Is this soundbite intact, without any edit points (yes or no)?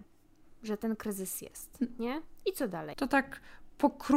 no